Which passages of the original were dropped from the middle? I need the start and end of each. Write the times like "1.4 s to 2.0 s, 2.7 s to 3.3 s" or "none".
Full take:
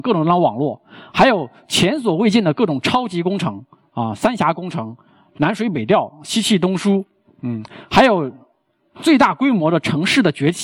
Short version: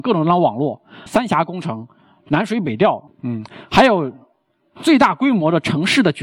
1.1 s to 4.2 s, 6.2 s to 7.3 s

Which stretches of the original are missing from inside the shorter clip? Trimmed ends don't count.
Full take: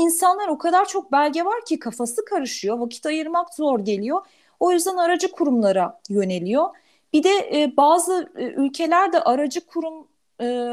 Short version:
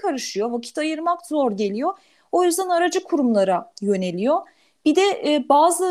none

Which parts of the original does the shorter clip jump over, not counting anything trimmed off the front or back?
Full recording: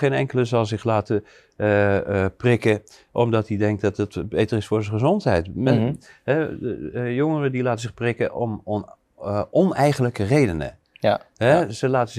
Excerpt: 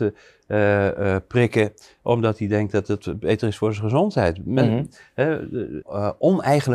6.9 s to 9.1 s

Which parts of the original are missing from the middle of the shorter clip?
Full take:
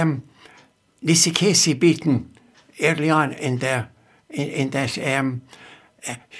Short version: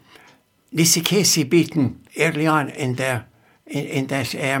2.4 s to 2.7 s

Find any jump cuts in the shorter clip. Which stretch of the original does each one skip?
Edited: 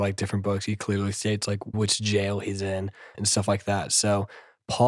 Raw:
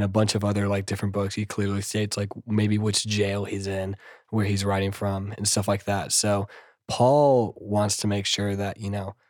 2.4 s to 2.8 s, 4.2 s to 5.3 s

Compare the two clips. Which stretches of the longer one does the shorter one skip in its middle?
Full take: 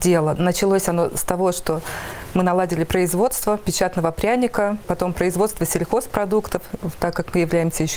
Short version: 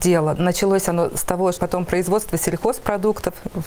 1.5 s to 4.8 s

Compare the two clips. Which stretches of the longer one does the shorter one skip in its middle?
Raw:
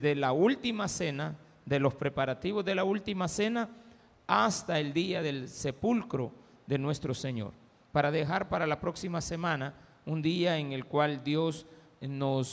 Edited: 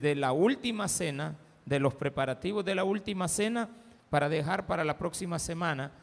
4.0 s to 7.8 s

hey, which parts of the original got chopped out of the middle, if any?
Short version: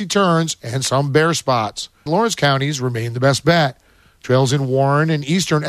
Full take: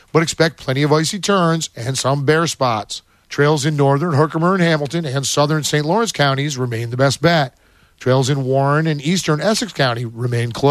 3.2 s to 5.8 s

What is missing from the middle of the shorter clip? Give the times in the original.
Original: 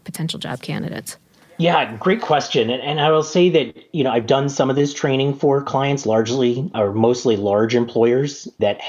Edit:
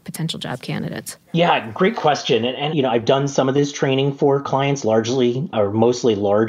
1.3 s to 1.5 s, 3.0 s to 3.9 s

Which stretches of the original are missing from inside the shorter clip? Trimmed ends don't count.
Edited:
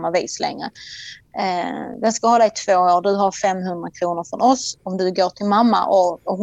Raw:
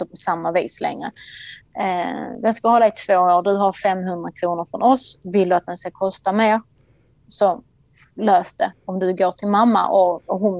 5.2 s to 8.8 s

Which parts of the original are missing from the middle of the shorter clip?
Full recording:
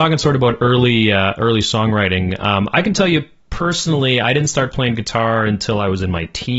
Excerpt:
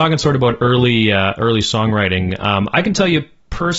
none

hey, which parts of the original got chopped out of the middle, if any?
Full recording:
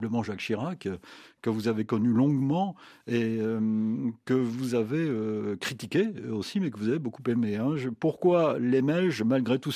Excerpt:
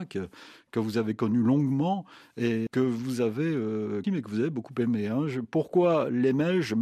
3.4 s to 4.2 s, 5.6 s to 6.5 s

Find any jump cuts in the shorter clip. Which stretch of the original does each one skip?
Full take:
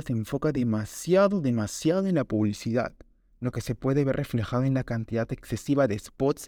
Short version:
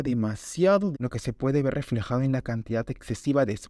1.4 s to 3.3 s

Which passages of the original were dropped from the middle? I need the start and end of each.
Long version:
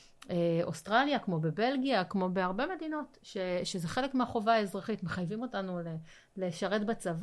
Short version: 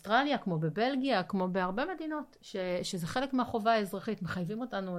none

